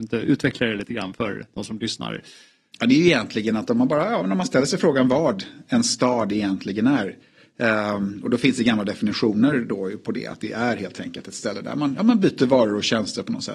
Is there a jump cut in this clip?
no; 0 cuts

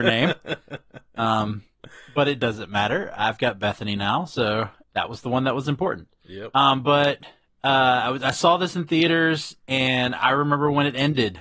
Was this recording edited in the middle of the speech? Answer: no; 0 cuts

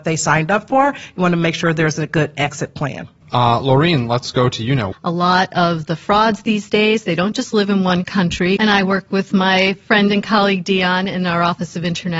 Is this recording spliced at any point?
yes; 3 cuts; at 3.2 s, 4.9 s, 8.6 s

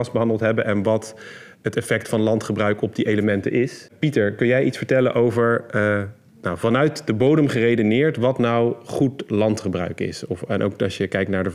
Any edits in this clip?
no; 0 cuts

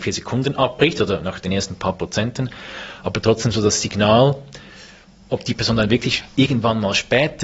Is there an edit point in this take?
no; 0 cuts

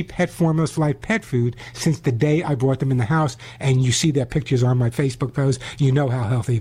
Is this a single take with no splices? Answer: yes; 0 cuts

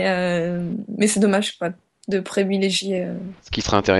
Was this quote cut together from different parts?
no; 0 cuts

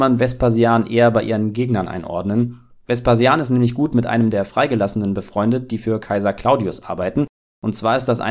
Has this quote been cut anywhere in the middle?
no; 0 cuts

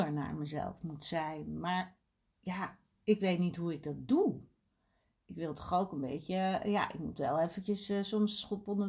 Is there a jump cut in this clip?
no; 0 cuts

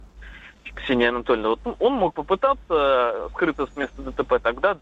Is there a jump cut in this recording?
no; 0 cuts

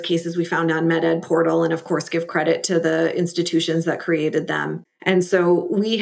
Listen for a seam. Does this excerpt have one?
yes; 1 cut; at 4.8 s

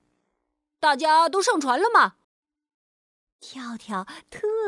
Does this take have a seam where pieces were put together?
yes; 1 cut; at 2.2 s

